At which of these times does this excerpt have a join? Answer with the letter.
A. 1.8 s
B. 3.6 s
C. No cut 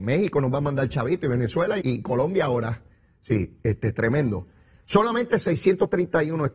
A